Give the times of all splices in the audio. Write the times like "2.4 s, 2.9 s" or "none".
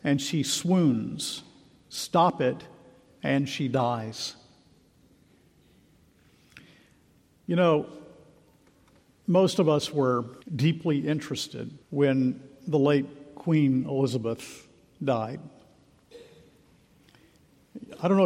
10.4 s, 11.8 s